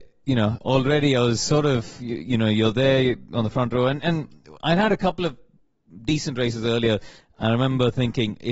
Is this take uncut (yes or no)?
no